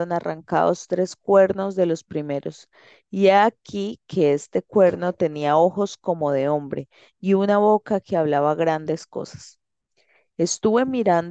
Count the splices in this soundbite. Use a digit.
0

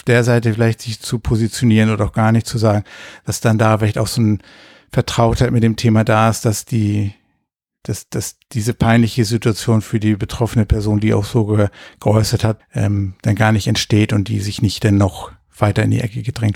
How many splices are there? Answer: 1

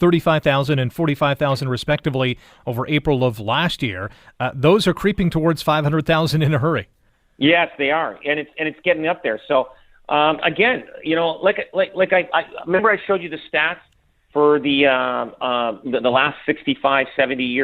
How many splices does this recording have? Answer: 0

